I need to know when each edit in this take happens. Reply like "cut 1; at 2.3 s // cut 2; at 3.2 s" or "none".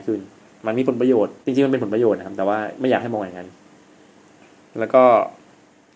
cut 1; at 1.4 s